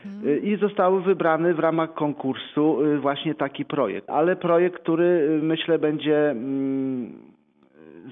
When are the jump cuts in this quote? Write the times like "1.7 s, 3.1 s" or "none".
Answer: 4.1 s